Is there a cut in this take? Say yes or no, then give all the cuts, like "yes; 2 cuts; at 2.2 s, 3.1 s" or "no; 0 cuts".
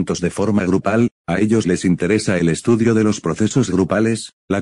no; 0 cuts